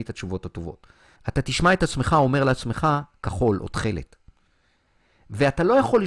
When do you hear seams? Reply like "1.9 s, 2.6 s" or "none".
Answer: 1.2 s